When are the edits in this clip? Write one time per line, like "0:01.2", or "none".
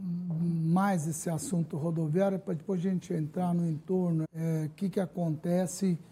0:04.2